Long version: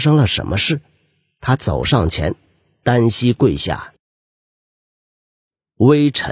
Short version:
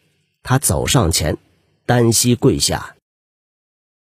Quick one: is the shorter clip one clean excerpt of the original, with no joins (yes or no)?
yes